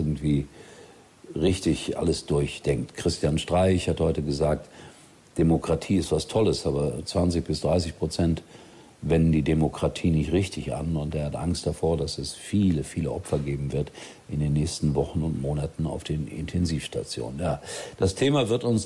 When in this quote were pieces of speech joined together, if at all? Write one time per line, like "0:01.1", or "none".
none